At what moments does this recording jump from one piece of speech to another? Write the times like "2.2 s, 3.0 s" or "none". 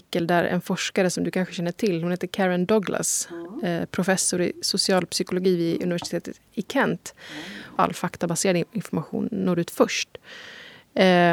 7.8 s